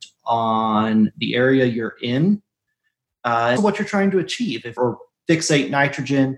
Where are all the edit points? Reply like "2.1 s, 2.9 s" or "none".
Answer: 3.6 s, 4.8 s